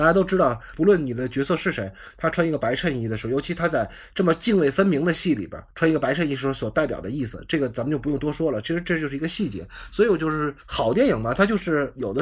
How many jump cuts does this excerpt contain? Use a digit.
0